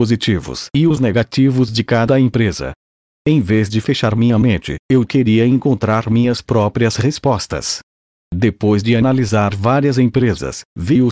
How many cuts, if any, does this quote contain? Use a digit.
0